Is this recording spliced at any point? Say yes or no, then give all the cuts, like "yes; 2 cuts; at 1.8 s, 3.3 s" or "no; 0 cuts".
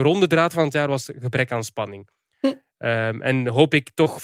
no; 0 cuts